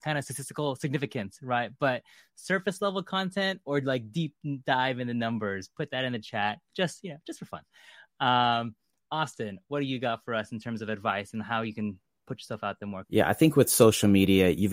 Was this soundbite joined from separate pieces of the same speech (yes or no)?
yes